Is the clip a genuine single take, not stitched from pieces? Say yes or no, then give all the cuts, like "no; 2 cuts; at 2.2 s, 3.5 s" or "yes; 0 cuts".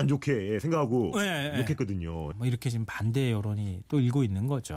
no; 1 cut; at 2.3 s